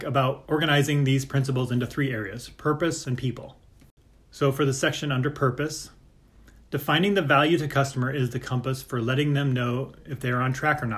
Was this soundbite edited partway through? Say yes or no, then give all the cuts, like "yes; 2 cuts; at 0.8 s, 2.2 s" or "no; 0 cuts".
yes; 1 cut; at 3.0 s